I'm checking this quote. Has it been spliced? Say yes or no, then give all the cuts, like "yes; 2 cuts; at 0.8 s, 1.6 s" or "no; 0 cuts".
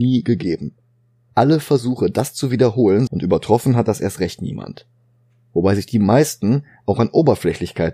yes; 1 cut; at 3.1 s